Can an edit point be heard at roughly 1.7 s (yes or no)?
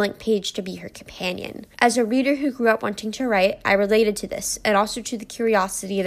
yes